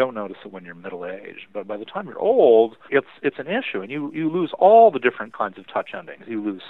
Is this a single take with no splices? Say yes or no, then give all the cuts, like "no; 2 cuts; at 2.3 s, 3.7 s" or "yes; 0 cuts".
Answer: no; 1 cut; at 2.9 s